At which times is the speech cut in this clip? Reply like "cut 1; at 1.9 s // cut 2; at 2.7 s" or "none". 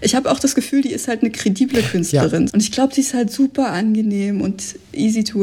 cut 1; at 2.5 s